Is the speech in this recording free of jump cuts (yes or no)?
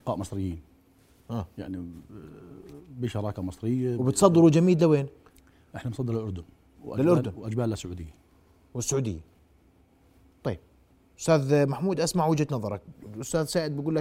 yes